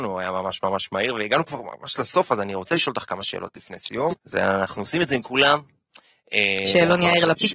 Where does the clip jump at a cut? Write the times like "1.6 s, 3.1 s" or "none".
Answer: 4.1 s